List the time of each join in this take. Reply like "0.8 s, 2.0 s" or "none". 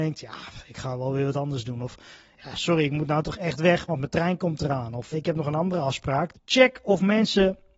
5.1 s, 6.3 s